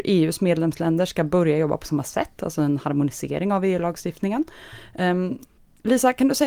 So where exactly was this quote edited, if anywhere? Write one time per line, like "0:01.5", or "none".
none